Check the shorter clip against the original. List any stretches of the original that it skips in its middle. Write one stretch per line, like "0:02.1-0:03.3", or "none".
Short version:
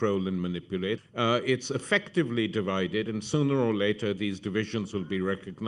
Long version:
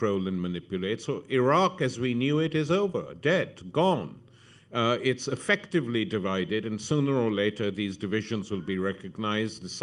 0:01.0-0:04.6